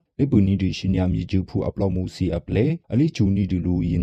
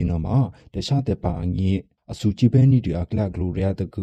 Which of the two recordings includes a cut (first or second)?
first